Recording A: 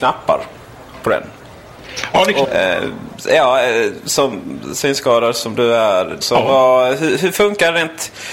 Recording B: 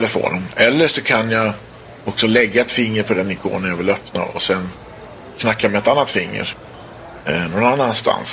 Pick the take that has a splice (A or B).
A